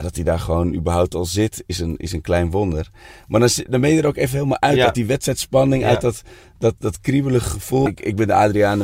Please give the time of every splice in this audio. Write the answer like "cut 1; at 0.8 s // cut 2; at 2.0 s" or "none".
cut 1; at 6.8 s // cut 2; at 7.9 s